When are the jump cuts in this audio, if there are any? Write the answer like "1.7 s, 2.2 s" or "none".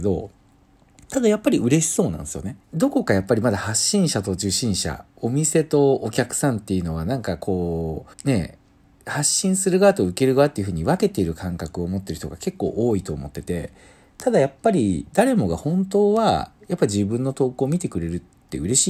2.6 s, 8.1 s

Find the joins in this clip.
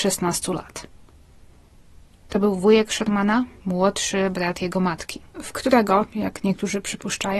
2.1 s, 5.3 s

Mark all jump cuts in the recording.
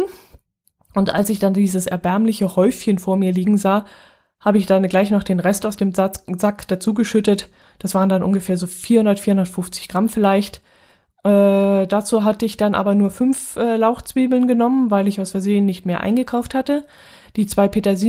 none

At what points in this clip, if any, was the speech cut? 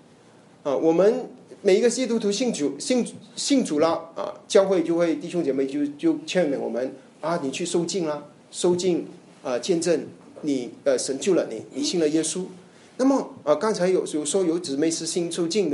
none

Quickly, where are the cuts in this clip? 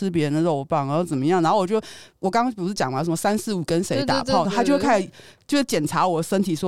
2.2 s, 4.4 s

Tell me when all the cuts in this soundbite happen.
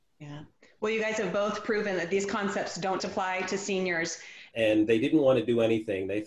3.0 s, 4.5 s

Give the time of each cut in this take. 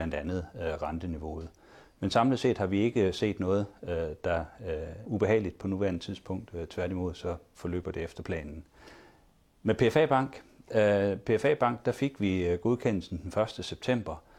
5.0 s

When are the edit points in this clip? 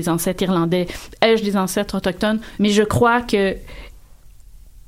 2.6 s

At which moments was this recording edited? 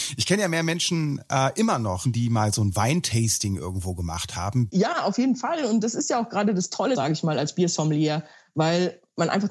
2.0 s, 4.7 s, 6.9 s

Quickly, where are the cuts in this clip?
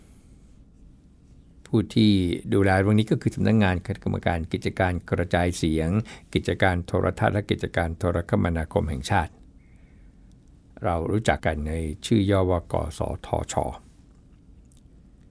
11.4 s

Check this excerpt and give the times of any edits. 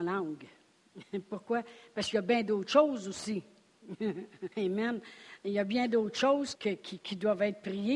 4.5 s, 6.5 s

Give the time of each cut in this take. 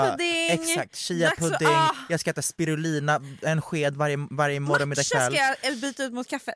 none

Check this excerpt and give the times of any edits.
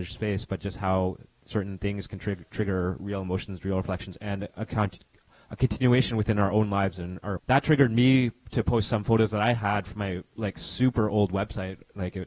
7.4 s

